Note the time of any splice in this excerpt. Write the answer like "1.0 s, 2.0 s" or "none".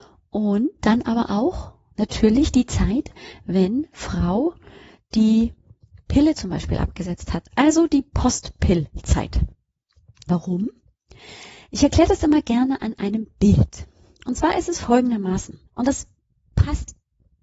10.3 s, 15.7 s